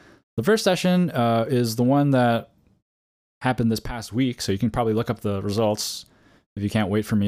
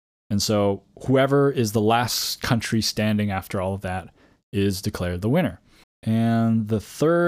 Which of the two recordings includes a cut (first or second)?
second